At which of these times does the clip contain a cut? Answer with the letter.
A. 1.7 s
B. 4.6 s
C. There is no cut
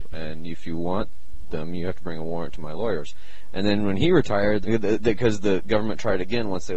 B